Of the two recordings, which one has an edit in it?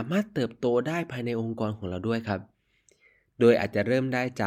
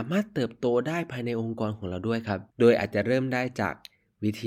second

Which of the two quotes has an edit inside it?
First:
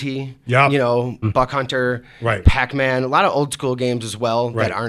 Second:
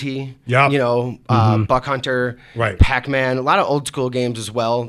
first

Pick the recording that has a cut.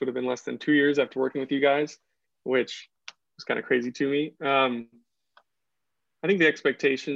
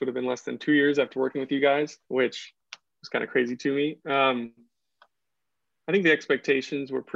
second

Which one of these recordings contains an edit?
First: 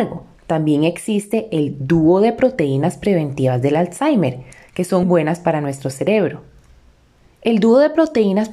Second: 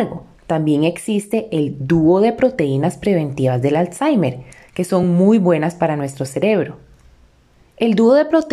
first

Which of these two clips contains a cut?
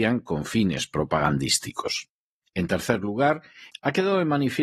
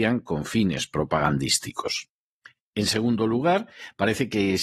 first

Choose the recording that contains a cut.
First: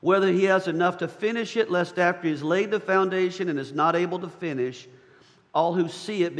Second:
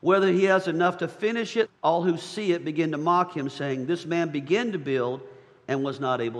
second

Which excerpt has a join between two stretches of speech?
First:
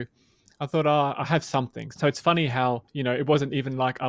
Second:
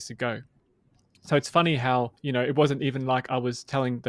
first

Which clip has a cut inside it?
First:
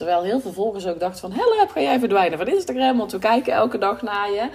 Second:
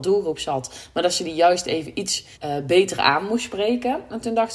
second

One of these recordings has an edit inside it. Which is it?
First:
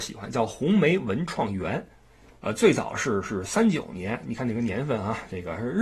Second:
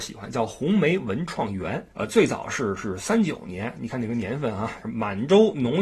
second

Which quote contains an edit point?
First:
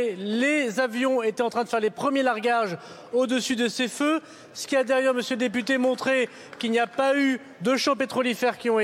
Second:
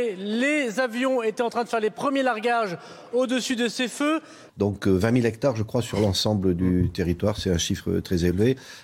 second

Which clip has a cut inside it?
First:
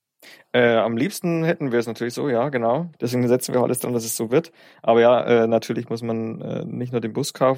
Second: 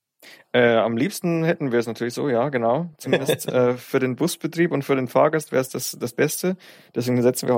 first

